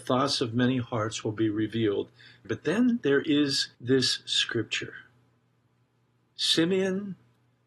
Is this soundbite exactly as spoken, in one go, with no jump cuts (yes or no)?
no